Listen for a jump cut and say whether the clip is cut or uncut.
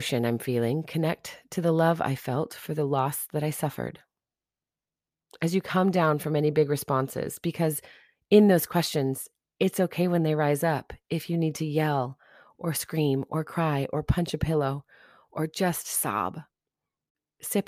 uncut